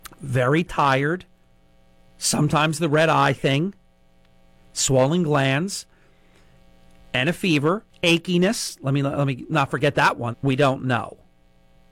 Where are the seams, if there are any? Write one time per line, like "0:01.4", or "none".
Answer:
0:07.9
0:10.3